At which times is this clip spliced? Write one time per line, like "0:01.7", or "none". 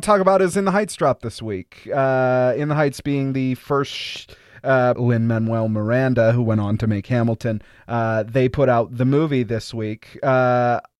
0:04.9